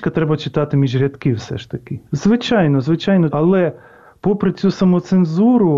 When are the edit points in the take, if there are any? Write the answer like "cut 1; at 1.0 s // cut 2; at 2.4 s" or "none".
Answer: cut 1; at 2.1 s // cut 2; at 3.3 s